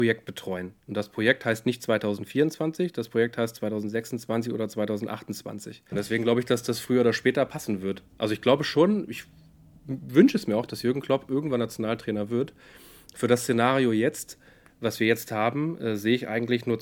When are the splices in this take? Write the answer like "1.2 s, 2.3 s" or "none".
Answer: 5.9 s